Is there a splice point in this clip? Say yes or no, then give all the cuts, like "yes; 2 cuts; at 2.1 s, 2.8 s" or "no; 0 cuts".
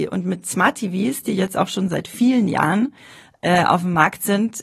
no; 0 cuts